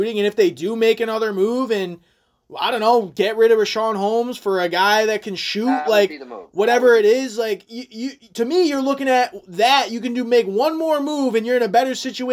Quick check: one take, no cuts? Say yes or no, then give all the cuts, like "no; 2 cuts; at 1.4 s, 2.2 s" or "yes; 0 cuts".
yes; 0 cuts